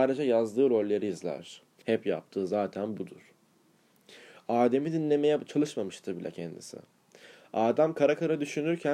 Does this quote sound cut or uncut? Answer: cut